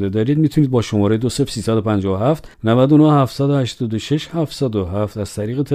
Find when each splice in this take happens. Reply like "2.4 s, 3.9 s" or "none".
2.5 s